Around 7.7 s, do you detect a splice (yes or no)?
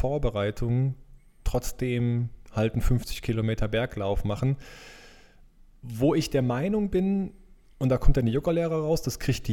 no